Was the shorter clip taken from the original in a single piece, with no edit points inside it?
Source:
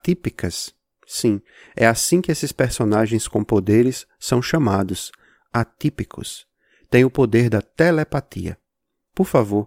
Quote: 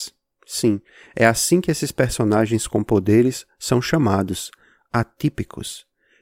yes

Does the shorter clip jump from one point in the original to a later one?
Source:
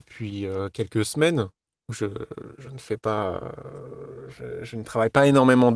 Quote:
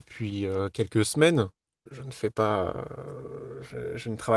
yes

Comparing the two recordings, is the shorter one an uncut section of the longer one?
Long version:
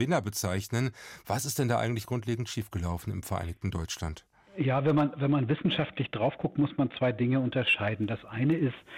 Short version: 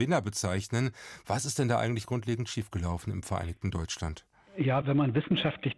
no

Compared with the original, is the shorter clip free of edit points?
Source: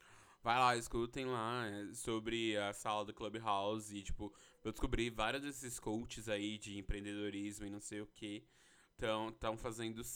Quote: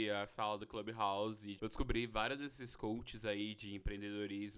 no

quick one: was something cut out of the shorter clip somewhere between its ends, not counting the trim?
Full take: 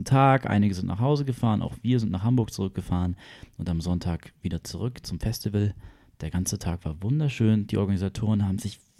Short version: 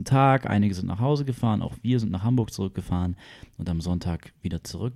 no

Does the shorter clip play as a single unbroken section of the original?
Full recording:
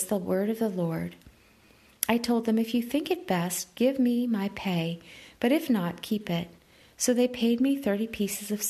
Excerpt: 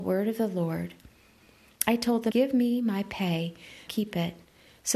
no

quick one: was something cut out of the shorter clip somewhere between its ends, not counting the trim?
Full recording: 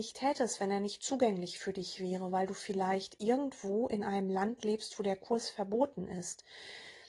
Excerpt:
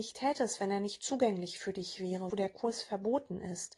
yes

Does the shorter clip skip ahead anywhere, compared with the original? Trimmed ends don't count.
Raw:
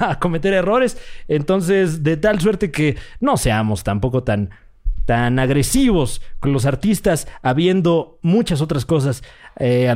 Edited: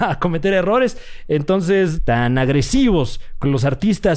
yes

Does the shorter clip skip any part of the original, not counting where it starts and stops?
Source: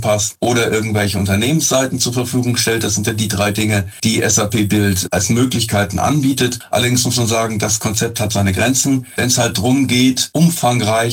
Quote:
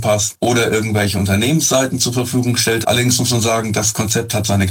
yes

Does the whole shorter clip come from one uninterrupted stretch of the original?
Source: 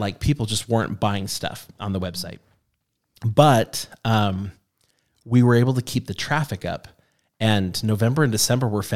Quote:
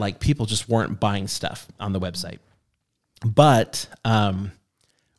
yes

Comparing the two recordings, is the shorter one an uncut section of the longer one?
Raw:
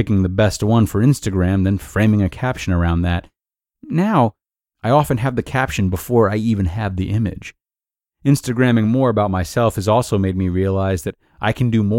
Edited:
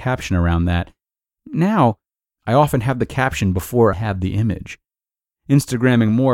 no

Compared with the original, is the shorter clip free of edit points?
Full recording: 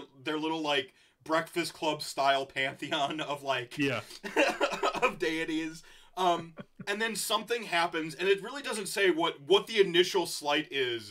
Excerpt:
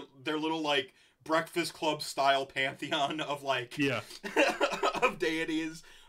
yes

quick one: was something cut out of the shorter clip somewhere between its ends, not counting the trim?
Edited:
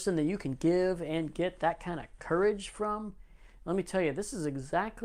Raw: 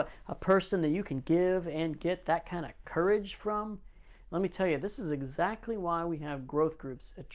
no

